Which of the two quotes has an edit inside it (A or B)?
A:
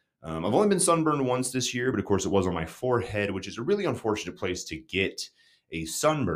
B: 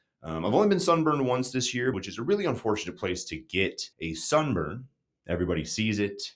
B